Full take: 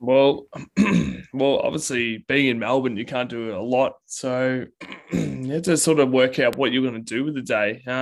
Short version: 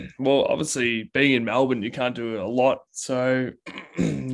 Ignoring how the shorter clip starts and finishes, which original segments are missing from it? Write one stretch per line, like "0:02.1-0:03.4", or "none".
none